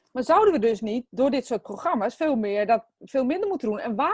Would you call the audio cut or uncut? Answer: uncut